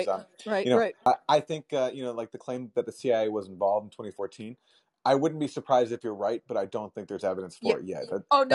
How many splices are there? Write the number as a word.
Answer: zero